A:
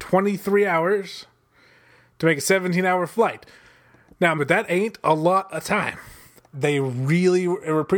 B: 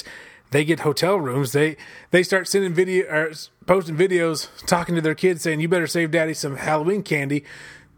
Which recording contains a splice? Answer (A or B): A